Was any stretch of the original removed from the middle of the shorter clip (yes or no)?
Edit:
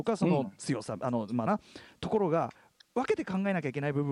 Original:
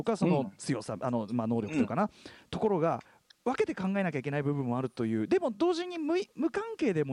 yes